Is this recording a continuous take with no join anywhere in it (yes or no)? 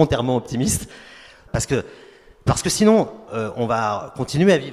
no